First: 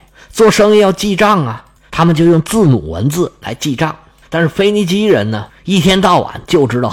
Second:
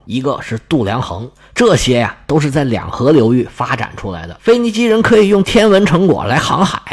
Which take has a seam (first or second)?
first